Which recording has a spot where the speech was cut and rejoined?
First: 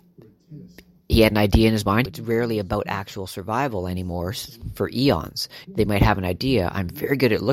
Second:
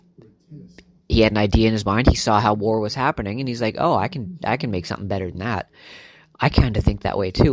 first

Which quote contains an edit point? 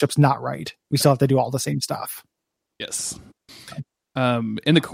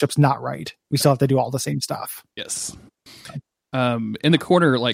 second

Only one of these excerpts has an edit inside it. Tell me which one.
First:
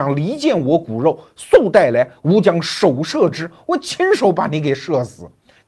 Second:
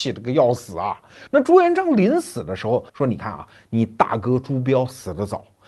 second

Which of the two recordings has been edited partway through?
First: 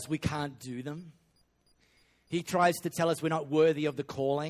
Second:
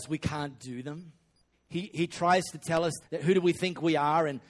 second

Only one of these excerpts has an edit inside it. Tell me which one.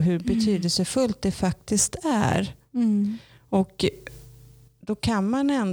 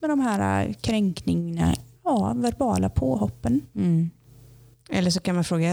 second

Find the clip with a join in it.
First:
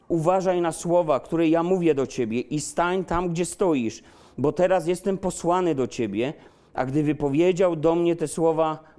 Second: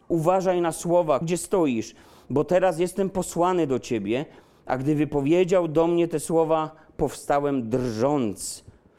second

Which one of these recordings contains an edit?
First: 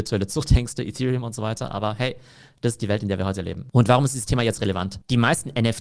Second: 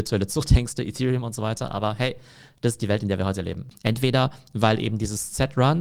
second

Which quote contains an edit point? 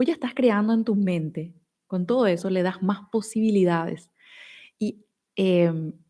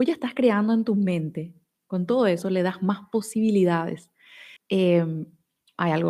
second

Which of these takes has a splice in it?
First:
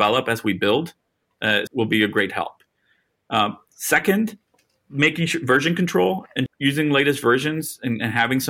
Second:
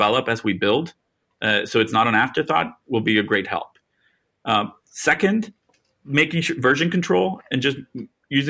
first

